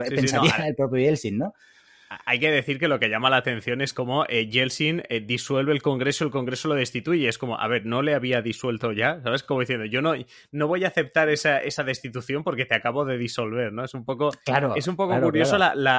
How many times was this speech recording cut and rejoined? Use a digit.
0